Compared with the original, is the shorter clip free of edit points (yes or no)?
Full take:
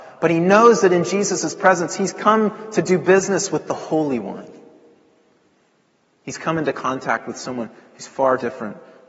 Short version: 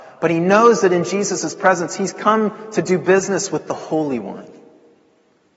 yes